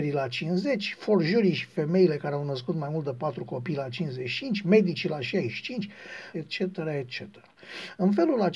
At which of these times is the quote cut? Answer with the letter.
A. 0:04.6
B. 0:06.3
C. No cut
B